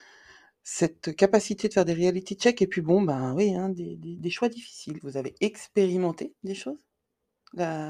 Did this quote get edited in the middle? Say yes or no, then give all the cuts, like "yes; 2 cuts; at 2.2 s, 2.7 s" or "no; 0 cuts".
yes; 1 cut; at 5.0 s